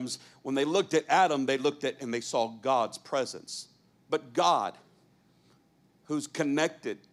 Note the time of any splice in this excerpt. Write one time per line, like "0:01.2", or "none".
0:03.9